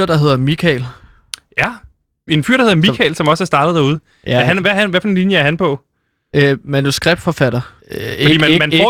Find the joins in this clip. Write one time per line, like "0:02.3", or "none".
0:02.3
0:07.8